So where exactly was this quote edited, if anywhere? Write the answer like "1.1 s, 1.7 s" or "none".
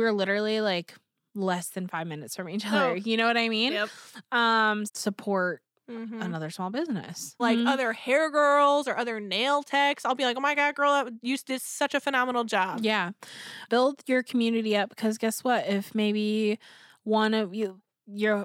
4.9 s, 7.4 s, 13.7 s